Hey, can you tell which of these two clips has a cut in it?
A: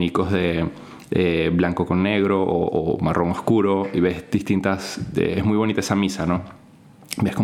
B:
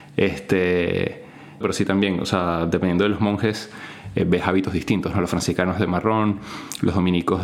B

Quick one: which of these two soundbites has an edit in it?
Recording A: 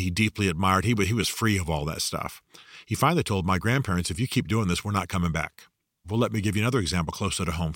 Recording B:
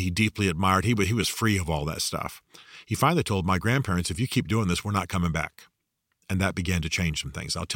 A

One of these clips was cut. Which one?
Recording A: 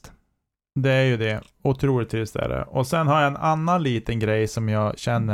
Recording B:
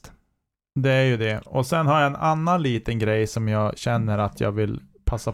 B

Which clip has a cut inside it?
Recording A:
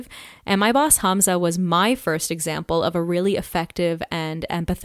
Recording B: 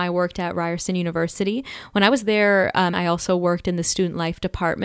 B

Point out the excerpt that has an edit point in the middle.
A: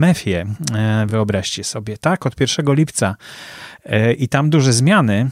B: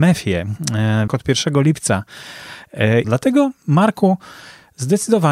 B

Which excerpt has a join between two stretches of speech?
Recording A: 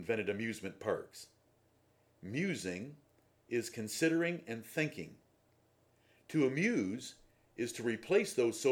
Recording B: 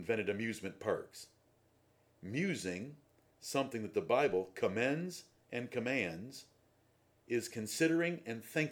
A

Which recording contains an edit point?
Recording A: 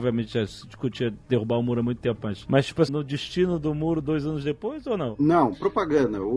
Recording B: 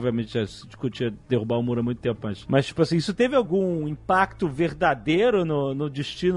A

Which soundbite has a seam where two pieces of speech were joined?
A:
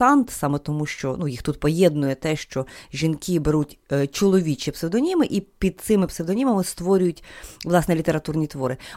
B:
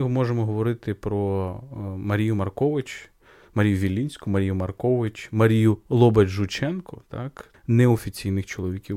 B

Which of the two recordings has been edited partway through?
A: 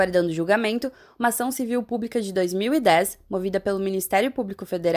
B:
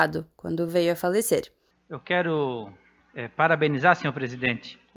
B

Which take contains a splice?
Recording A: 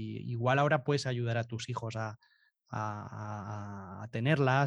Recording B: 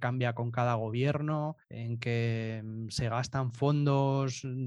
B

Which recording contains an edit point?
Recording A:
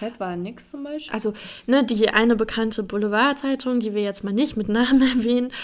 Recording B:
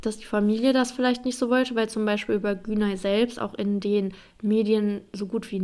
A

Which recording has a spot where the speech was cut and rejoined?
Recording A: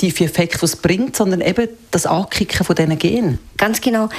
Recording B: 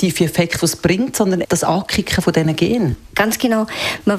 B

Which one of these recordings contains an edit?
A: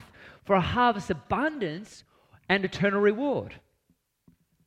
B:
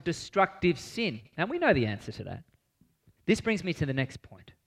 B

